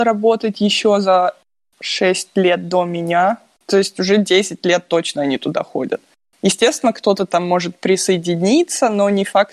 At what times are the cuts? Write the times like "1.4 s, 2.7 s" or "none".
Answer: none